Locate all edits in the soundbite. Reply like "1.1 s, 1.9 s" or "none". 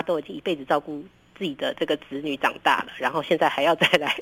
none